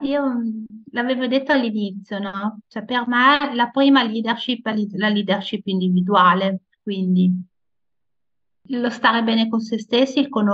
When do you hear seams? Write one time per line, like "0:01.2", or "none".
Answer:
none